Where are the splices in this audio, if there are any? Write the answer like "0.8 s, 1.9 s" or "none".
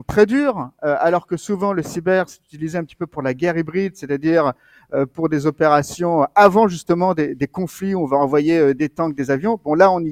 none